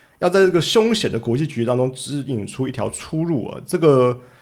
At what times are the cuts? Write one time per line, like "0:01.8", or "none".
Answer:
none